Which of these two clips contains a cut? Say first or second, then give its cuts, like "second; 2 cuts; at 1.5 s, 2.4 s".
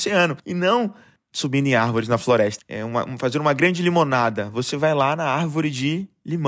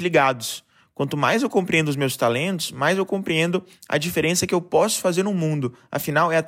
first; 1 cut; at 2.6 s